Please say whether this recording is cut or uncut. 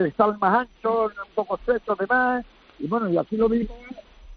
uncut